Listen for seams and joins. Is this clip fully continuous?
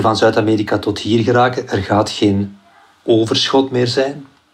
yes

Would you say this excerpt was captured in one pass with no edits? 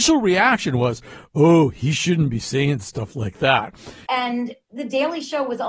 no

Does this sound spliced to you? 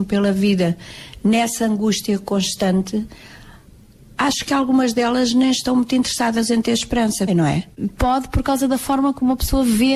yes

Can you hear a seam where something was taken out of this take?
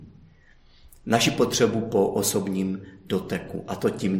no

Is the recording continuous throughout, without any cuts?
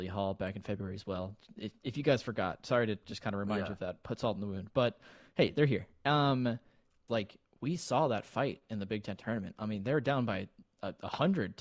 no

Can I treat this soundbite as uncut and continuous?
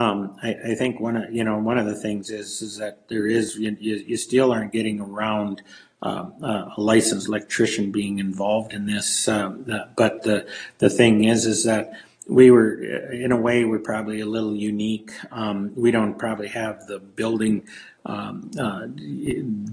yes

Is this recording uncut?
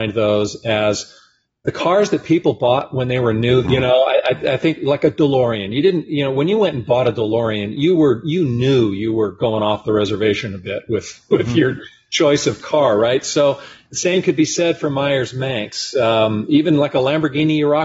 no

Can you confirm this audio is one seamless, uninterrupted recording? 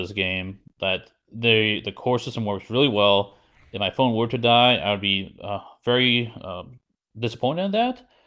yes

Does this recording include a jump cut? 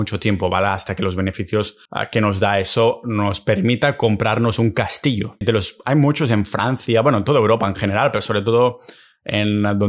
yes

